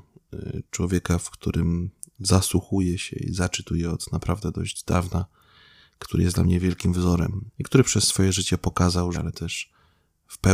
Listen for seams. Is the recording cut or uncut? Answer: cut